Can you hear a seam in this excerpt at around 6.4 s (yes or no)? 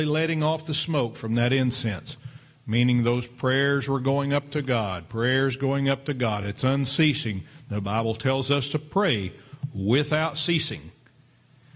no